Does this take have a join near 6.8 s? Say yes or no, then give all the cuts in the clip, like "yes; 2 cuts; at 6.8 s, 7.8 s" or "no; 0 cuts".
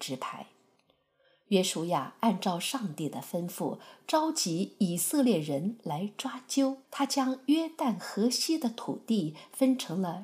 yes; 1 cut; at 6.8 s